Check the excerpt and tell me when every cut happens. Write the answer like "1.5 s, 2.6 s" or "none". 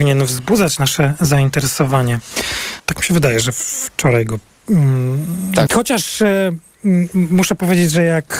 2.8 s, 5.7 s